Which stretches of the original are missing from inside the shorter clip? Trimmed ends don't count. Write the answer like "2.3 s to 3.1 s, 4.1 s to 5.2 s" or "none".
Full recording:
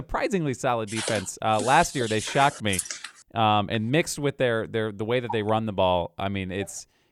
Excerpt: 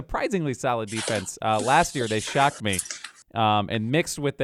none